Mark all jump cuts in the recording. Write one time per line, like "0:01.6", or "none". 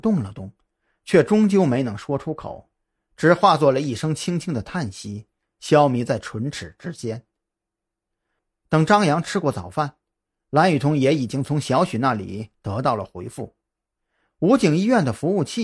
none